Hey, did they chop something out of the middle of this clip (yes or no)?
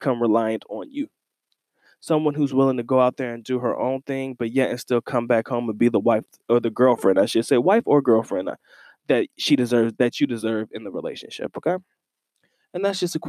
no